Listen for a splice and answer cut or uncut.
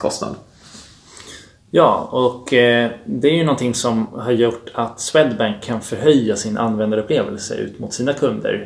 uncut